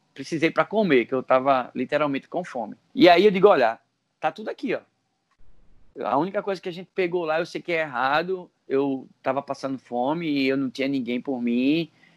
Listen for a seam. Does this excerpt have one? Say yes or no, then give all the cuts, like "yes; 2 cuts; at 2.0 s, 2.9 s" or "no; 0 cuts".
yes; 1 cut; at 8.7 s